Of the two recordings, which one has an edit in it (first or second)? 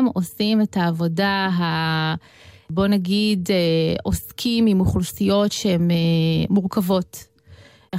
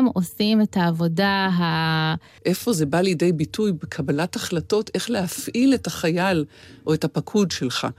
second